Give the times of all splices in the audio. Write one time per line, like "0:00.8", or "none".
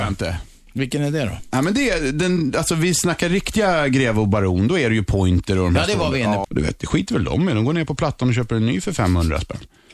0:06.4